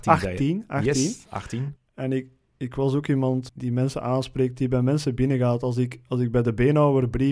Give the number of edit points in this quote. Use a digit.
2